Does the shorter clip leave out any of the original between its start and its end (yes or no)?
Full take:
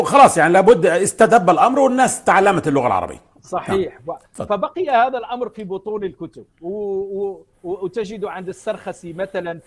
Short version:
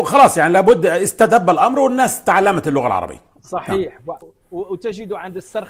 yes